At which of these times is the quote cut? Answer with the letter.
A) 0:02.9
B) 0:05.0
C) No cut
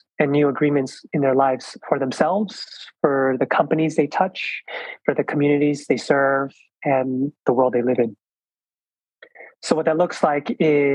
C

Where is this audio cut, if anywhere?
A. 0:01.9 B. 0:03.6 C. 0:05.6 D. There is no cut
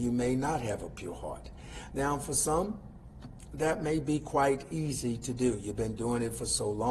A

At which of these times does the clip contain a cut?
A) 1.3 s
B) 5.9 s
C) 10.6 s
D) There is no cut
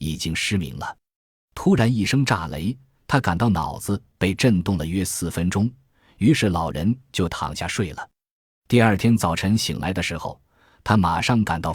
D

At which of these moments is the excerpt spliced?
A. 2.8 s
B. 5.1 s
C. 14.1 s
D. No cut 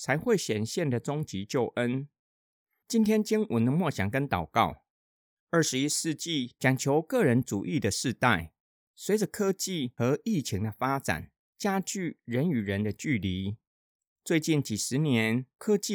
C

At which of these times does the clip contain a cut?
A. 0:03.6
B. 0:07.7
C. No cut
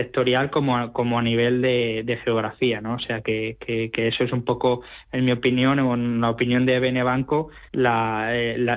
B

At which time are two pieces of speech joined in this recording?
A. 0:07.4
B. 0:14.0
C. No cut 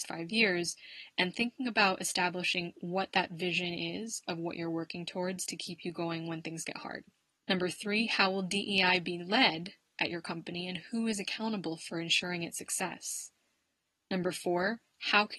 A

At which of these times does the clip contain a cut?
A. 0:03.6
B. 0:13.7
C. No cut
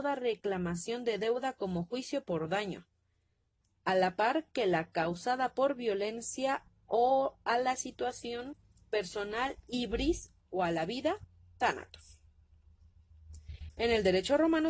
A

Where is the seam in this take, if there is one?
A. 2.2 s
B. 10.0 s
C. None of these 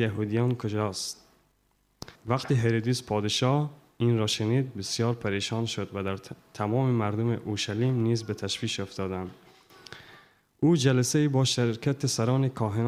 A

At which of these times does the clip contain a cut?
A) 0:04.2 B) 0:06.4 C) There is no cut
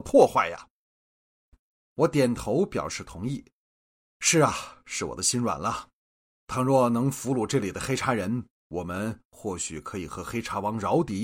C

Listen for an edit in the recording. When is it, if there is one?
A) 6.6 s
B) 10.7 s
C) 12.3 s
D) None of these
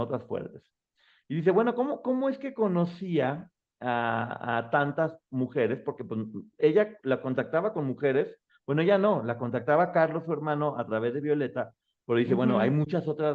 A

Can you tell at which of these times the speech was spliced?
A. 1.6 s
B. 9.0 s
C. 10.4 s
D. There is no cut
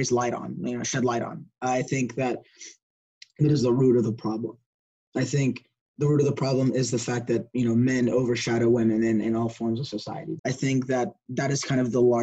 C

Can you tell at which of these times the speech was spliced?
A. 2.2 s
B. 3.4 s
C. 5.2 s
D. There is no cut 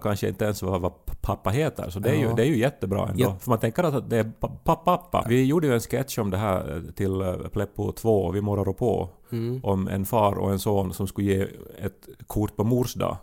C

